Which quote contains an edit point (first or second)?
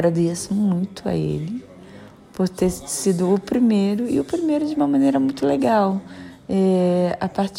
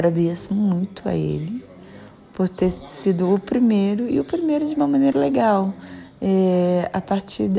second